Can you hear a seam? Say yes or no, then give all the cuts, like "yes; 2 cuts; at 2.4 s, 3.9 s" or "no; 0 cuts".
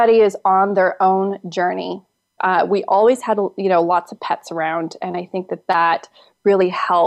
yes; 1 cut; at 2.4 s